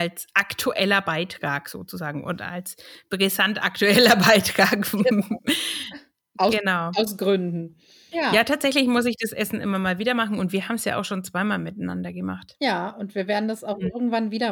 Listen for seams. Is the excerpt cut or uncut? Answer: cut